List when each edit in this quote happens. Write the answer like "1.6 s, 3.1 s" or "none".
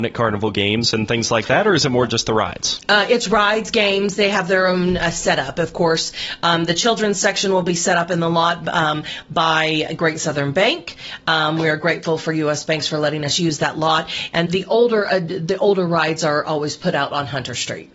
14.5 s